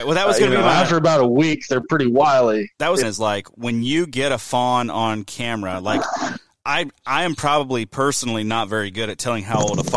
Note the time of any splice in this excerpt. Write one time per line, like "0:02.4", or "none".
0:03.0

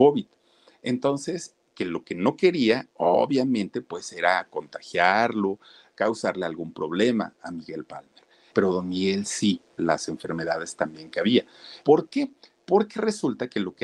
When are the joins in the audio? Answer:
0:08.5
0:09.8
0:11.8

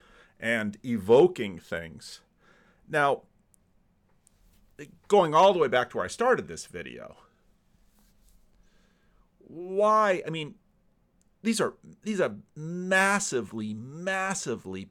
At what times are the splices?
none

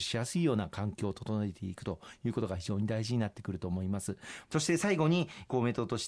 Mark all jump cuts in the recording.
0:04.5

